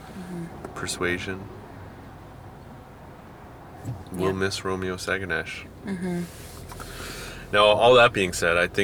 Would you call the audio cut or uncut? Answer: uncut